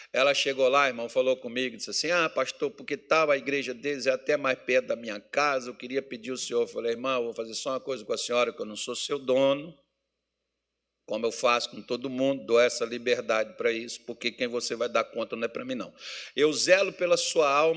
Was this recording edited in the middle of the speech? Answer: no; 0 cuts

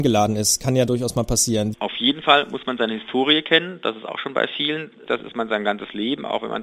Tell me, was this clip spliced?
yes; 2 cuts; at 1.7 s, 5.1 s

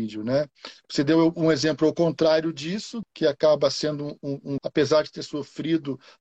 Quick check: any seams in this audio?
yes; 2 cuts; at 3.0 s, 4.6 s

